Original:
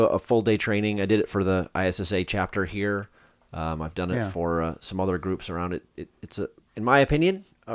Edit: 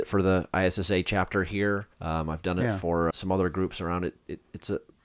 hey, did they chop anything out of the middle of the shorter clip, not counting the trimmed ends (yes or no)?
yes